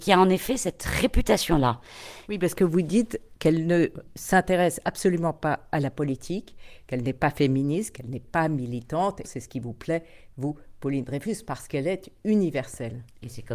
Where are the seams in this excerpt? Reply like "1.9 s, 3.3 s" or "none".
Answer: 2.2 s, 9.2 s